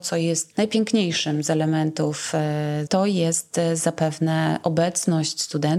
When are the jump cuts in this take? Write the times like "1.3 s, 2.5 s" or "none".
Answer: 2.9 s